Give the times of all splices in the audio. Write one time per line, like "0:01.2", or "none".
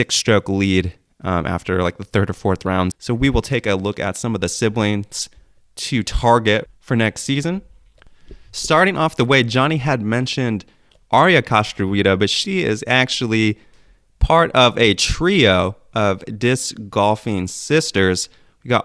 0:02.9
0:06.7